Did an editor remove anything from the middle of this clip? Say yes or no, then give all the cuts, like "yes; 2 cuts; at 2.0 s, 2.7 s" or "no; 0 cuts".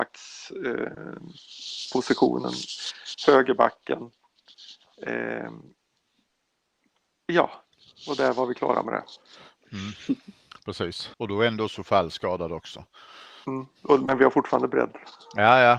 yes; 1 cut; at 11.1 s